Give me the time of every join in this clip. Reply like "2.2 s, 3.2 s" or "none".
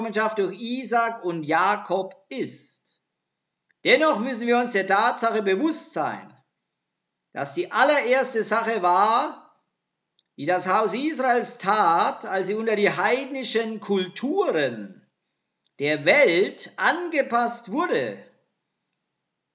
none